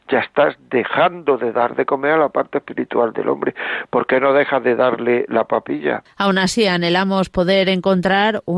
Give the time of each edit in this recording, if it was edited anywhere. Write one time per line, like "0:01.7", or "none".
0:06.1